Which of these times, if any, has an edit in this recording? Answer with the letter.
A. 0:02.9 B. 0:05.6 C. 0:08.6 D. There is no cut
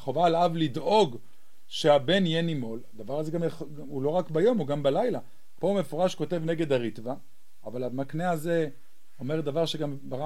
B